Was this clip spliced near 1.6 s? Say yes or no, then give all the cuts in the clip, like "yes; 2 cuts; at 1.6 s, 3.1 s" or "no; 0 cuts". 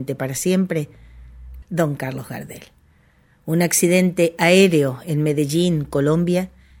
yes; 1 cut; at 1.6 s